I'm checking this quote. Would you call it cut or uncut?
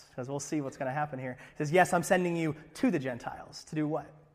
uncut